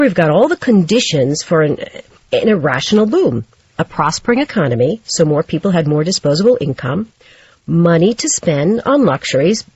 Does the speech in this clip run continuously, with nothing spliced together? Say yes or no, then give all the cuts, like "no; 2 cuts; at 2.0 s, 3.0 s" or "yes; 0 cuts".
yes; 0 cuts